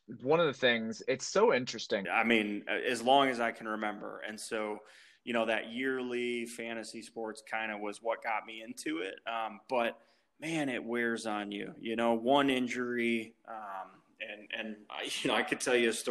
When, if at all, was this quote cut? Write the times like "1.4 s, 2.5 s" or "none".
2.0 s